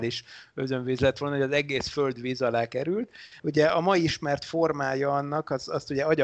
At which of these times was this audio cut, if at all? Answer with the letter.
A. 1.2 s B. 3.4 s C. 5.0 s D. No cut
B